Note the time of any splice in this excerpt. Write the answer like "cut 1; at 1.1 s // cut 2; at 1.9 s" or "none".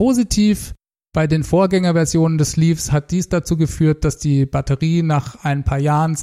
cut 1; at 0.9 s